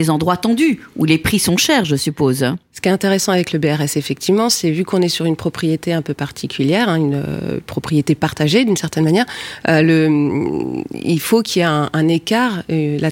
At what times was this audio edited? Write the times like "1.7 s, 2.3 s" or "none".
none